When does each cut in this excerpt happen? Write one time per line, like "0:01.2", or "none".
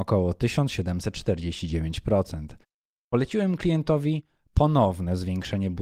none